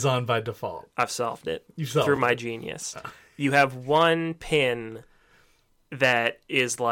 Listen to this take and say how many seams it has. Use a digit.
0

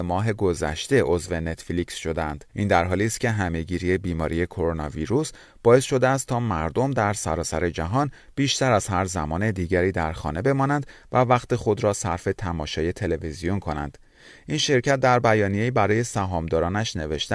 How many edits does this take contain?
1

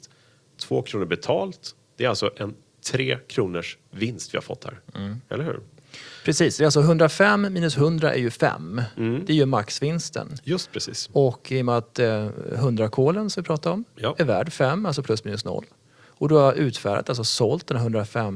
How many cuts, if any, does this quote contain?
0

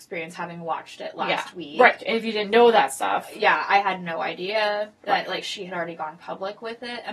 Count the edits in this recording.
0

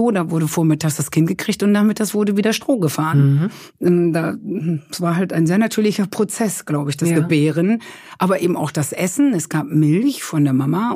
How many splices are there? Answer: 0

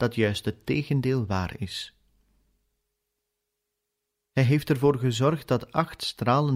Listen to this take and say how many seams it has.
1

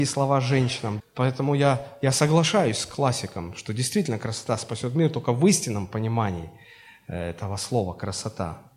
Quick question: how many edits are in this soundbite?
1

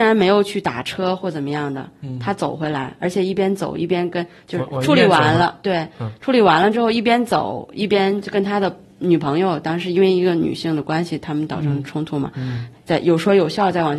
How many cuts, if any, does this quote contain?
1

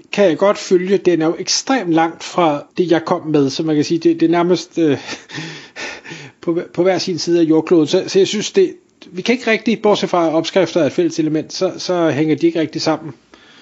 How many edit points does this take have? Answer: 1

